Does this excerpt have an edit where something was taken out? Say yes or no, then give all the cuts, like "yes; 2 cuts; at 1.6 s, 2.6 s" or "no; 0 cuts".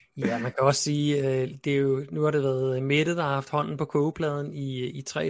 no; 0 cuts